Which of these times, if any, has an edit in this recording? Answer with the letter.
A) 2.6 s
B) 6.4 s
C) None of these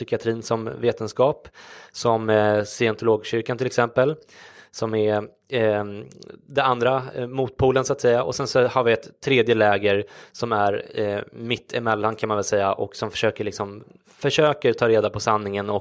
C